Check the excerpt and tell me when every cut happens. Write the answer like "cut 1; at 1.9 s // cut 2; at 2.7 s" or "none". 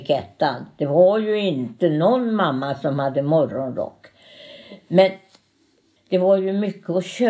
cut 1; at 6.0 s